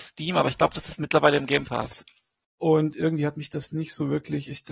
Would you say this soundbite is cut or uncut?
cut